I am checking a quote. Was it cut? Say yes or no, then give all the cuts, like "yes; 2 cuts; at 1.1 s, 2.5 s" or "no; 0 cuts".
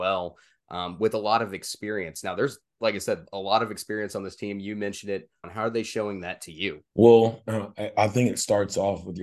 yes; 2 cuts; at 5.4 s, 6.9 s